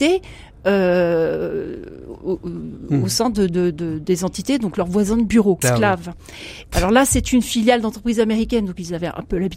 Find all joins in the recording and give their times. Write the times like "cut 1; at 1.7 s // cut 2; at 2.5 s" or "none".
cut 1; at 5.6 s // cut 2; at 6.7 s